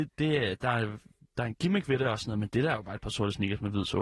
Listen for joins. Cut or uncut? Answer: uncut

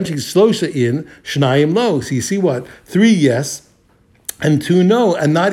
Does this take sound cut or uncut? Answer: uncut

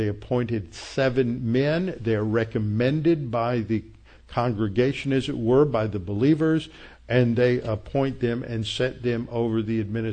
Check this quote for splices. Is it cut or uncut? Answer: uncut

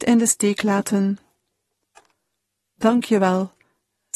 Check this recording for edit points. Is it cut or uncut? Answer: uncut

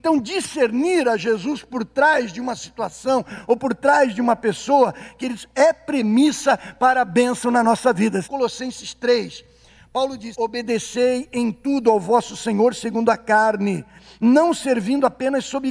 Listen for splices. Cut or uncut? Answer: cut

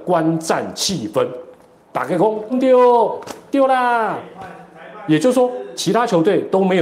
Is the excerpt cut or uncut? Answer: cut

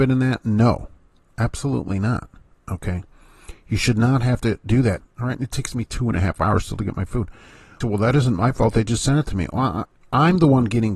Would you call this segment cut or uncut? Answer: cut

